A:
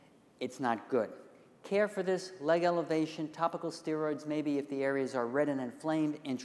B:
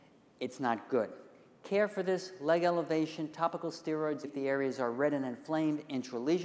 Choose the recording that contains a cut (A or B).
B